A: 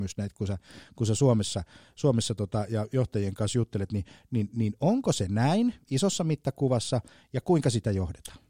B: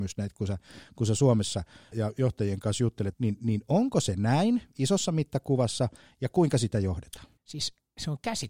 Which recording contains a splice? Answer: B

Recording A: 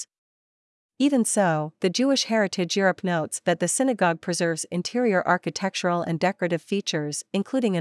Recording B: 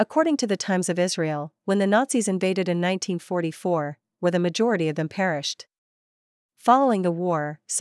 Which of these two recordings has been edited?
B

